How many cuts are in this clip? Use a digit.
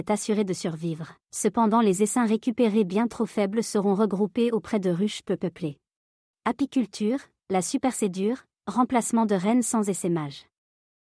2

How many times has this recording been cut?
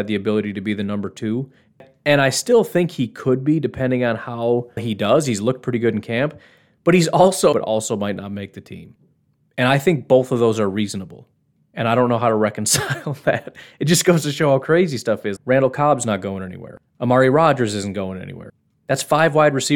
3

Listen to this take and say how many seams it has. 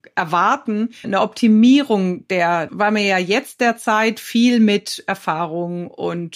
2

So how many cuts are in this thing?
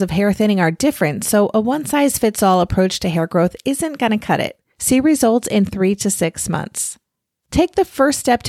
1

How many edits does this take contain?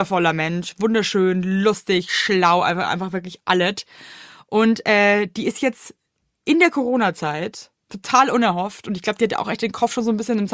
0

